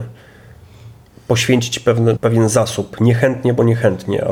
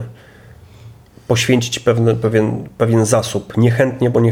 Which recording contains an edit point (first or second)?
first